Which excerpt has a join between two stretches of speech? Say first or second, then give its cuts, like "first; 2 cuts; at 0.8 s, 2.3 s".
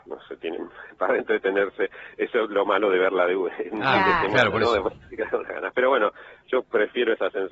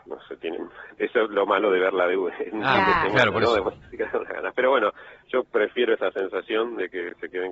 second; 1 cut; at 1.0 s